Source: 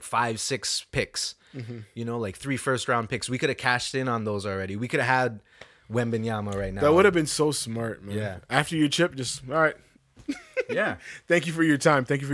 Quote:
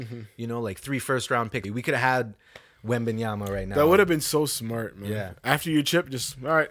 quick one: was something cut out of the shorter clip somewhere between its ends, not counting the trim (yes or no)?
yes